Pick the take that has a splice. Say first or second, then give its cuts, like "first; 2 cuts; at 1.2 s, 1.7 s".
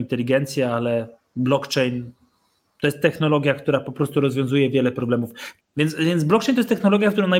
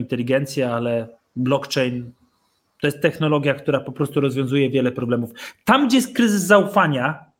first; 1 cut; at 5.6 s